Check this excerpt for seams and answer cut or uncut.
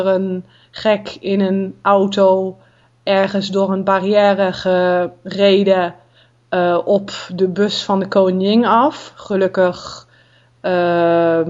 uncut